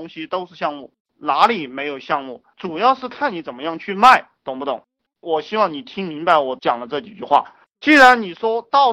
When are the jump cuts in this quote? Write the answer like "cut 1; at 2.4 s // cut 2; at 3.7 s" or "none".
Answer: cut 1; at 5.1 s // cut 2; at 7.6 s